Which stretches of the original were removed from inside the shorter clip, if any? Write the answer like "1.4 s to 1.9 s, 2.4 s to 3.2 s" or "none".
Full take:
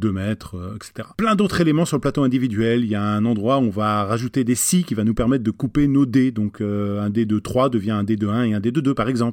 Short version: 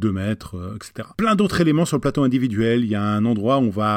none